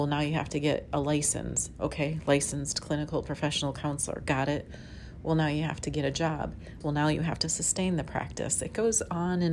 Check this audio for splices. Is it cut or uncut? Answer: cut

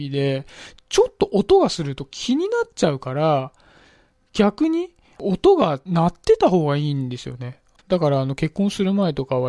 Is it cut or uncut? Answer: cut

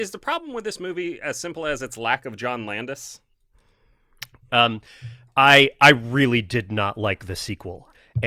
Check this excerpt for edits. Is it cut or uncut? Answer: cut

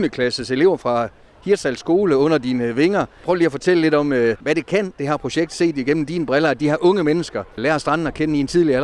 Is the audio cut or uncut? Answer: uncut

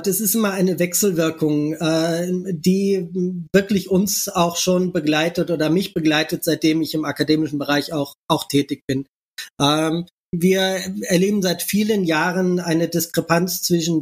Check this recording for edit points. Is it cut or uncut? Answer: uncut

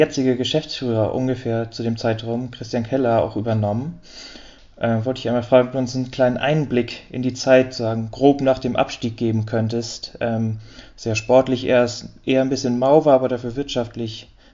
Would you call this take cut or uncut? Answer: uncut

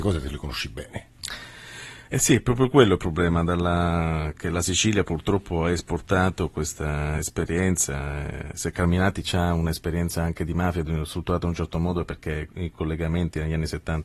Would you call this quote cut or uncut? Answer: uncut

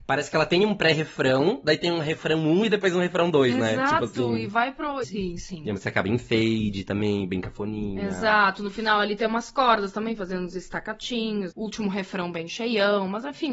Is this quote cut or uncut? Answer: cut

